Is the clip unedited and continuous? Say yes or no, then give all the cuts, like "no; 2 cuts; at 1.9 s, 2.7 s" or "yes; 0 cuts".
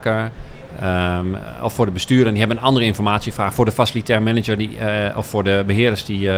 yes; 0 cuts